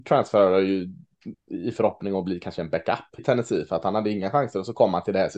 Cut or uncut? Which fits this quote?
cut